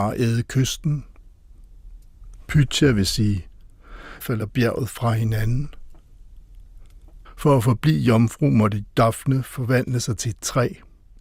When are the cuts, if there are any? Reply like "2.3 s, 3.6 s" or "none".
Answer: 4.2 s, 7.2 s